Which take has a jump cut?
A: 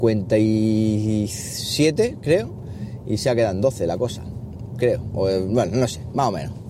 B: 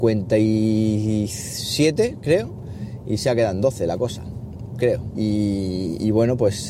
B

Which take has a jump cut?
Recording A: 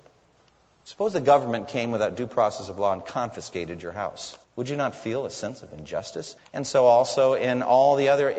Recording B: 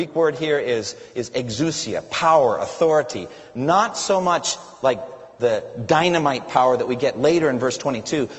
A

